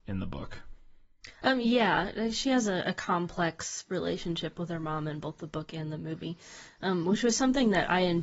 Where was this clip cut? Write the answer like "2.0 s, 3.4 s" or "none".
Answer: none